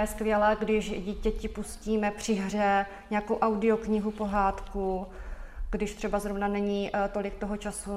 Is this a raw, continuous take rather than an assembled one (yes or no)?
yes